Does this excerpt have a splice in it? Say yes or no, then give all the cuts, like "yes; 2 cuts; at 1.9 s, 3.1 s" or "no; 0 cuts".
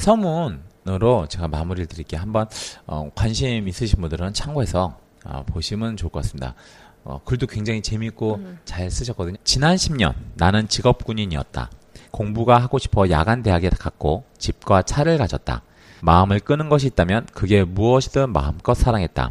yes; 3 cuts; at 9.3 s, 12.0 s, 16.0 s